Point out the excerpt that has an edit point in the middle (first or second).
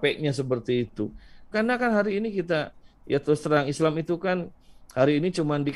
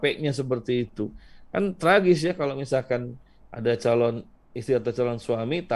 first